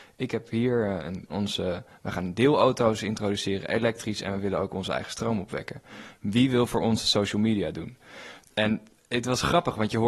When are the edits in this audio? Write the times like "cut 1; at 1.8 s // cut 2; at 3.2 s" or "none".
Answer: cut 1; at 1.3 s